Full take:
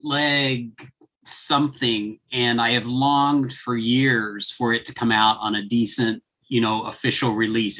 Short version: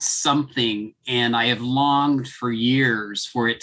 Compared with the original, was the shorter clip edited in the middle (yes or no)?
no